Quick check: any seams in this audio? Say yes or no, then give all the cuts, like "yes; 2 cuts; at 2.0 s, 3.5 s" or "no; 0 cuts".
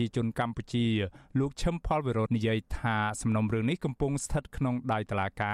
yes; 1 cut; at 2.3 s